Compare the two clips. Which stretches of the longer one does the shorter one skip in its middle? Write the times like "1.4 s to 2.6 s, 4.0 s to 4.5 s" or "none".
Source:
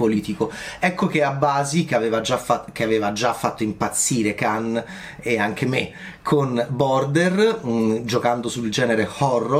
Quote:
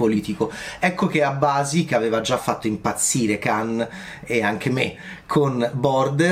2.4 s to 3.3 s

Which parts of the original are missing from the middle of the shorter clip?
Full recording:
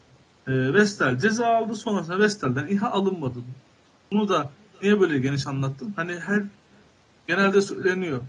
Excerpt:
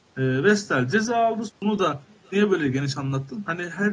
1.8 s to 4.0 s

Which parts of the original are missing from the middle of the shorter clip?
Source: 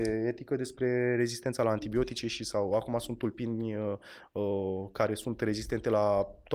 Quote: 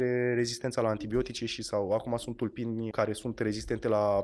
3.7 s to 4.9 s

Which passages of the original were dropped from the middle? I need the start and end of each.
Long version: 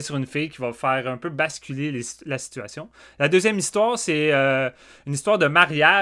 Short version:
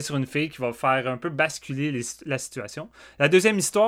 none

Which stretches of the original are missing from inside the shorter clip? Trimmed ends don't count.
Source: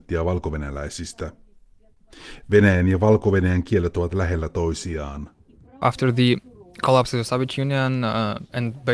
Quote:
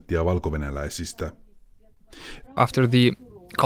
2.4 s to 5.7 s

